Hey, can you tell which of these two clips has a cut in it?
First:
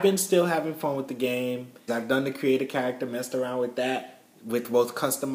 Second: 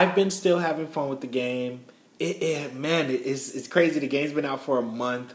first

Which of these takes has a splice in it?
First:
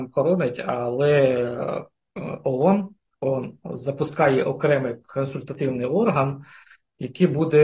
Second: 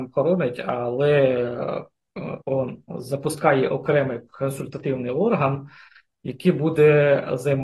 second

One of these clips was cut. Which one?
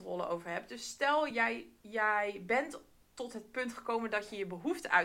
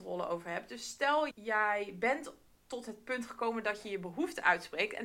second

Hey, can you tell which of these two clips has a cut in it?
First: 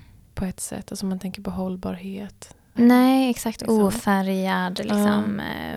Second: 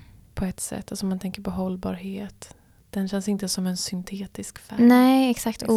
first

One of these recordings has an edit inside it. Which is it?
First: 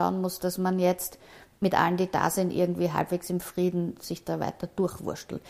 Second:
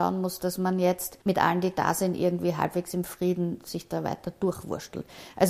second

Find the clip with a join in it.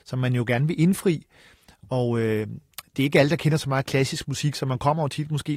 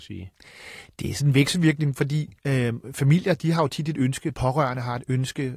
second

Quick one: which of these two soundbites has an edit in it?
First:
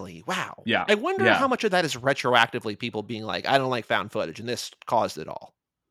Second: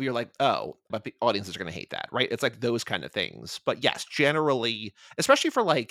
second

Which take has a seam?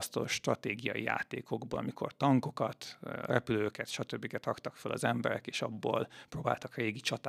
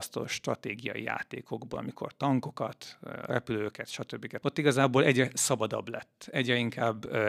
second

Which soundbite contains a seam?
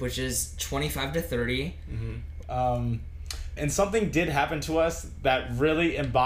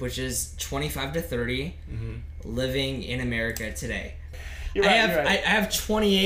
first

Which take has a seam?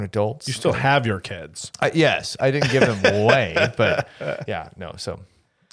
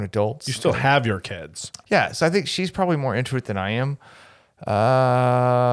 second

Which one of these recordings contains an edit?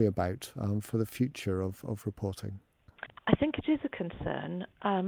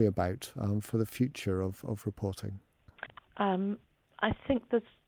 second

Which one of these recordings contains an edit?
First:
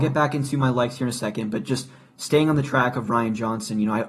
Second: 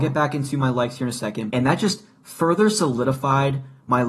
second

